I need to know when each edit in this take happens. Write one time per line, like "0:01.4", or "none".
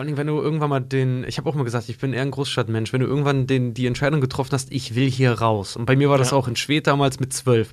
none